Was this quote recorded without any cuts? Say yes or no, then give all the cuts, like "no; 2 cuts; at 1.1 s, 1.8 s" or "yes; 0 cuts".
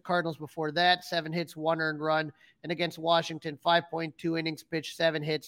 yes; 0 cuts